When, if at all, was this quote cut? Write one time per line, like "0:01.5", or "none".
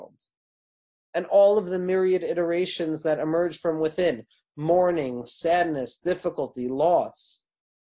none